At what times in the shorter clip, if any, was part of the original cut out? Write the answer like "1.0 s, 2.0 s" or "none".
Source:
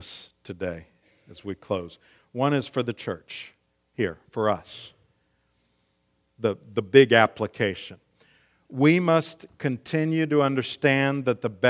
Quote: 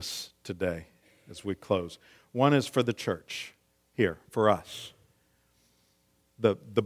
none